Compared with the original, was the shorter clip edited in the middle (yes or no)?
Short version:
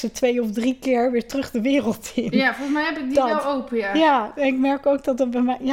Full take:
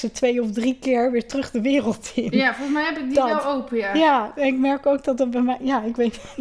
no